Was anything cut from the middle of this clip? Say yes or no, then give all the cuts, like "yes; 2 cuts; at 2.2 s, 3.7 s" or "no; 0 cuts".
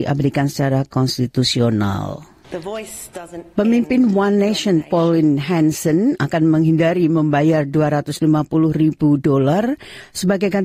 yes; 1 cut; at 2.4 s